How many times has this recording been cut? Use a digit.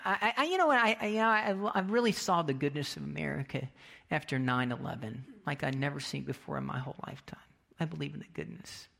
0